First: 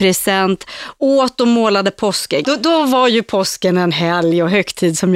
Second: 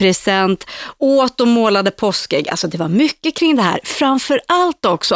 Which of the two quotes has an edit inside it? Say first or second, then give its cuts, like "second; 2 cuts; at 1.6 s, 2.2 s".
first; 1 cut; at 2.4 s